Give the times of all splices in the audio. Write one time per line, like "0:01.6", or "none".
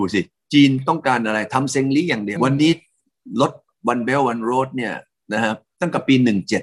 0:02.4